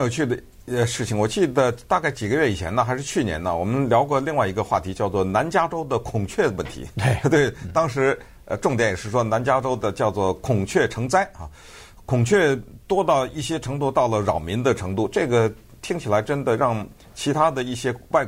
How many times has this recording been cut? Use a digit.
0